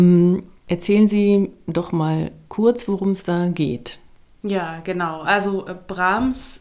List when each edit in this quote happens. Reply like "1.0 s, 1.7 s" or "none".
none